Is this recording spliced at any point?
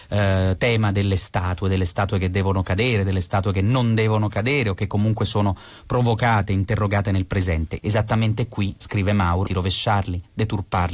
yes; 2 cuts; at 7.8 s, 9.5 s

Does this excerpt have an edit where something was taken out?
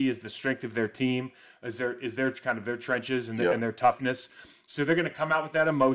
no; 0 cuts

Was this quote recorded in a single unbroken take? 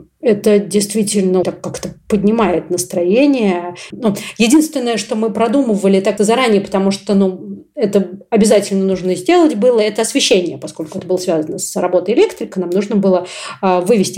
no; 3 cuts; at 1.4 s, 3.9 s, 6.2 s

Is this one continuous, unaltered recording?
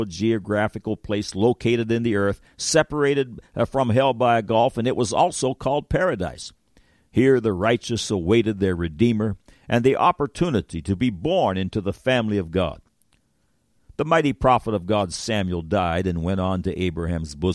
yes; 0 cuts

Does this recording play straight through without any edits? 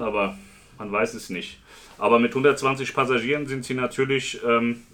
yes; 0 cuts

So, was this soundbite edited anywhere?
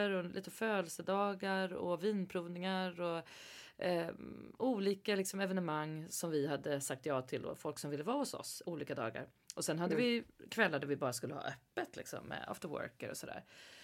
no; 0 cuts

